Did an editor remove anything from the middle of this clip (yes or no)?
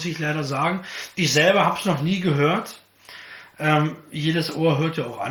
no